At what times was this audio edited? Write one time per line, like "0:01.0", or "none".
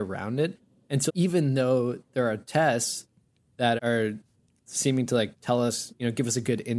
0:01.1
0:03.8